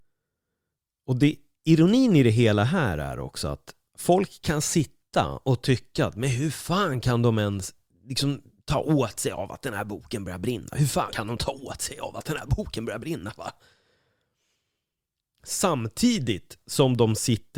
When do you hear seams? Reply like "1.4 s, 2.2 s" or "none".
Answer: 11.1 s